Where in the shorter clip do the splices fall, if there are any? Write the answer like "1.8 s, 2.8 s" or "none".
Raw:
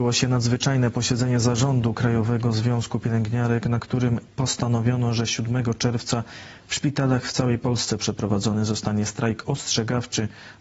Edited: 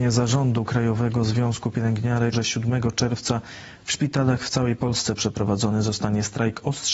2.3 s